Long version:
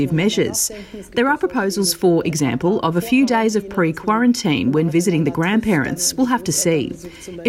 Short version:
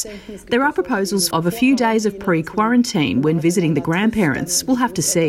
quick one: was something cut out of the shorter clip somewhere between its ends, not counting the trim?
yes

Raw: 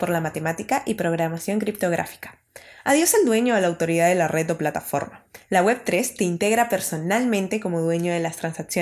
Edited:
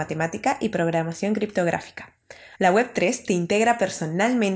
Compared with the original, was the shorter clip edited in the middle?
yes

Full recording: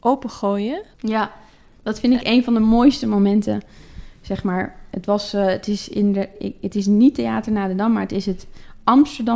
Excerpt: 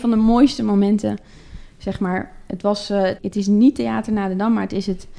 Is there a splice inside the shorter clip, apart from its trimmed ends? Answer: yes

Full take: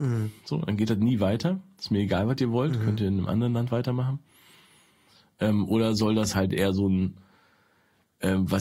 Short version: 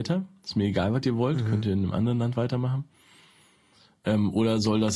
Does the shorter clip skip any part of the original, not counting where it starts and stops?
no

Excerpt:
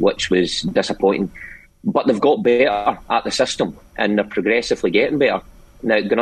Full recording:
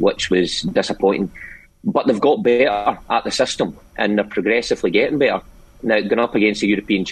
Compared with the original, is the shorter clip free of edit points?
yes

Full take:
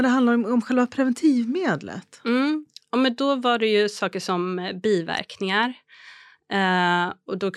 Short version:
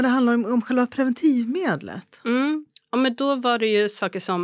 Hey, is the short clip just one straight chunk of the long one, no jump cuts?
yes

